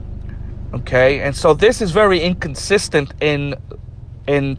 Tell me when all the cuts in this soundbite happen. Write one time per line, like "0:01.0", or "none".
none